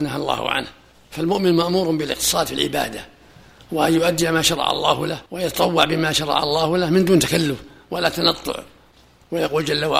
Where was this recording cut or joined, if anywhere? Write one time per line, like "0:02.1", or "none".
0:05.3